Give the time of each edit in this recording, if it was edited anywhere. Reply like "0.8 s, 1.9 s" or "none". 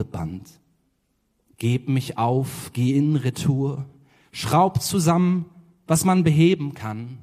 1.5 s